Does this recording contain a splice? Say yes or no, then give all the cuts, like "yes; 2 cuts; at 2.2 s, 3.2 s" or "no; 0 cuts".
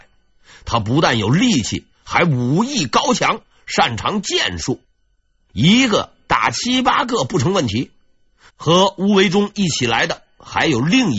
yes; 1 cut; at 8.5 s